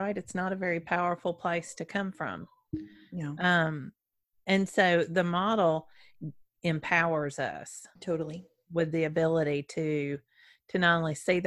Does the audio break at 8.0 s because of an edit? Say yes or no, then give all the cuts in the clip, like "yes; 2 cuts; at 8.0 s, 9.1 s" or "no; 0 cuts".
yes; 1 cut; at 8.0 s